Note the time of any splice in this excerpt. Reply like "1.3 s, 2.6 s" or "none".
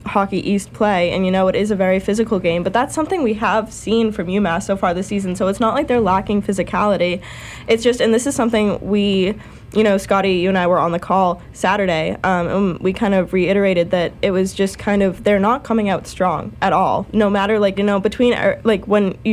17.8 s